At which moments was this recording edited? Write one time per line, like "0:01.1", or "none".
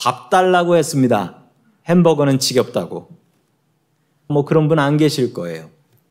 0:04.3